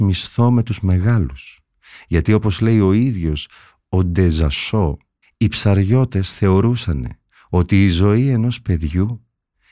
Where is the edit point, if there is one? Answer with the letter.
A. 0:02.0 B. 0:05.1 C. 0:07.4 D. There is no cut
D